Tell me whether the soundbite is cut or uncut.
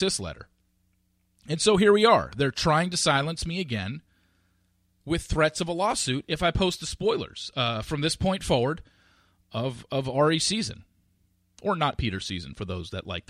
uncut